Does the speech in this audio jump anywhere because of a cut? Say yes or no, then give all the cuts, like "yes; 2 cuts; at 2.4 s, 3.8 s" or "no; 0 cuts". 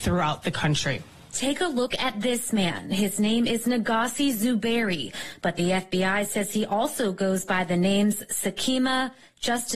no; 0 cuts